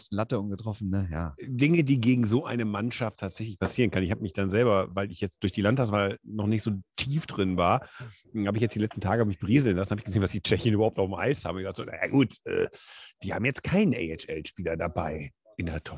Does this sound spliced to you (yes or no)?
no